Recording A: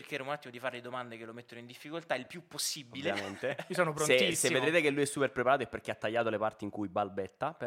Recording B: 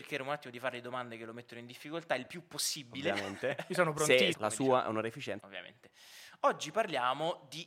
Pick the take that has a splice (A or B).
B